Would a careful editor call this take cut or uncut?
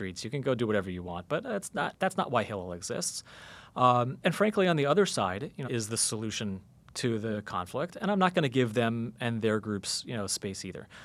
cut